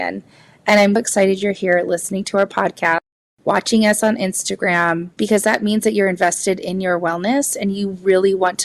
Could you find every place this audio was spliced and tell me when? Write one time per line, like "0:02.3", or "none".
0:01.0
0:05.1